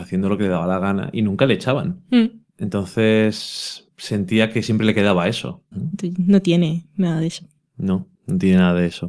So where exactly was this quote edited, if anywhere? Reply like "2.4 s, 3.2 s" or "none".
5.7 s